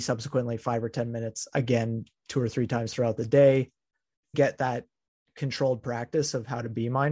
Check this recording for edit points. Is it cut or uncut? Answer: cut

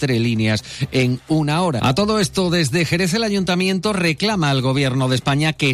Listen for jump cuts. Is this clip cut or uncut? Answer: cut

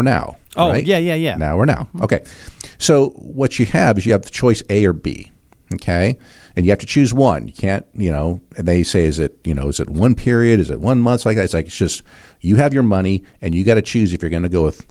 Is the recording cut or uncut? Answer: uncut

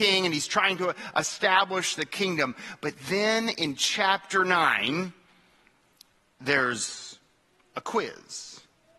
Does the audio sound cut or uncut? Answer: uncut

